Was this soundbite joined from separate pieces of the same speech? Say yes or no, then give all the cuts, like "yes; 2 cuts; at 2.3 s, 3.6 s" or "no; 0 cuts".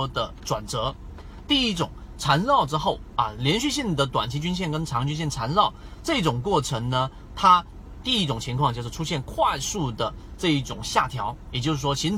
no; 0 cuts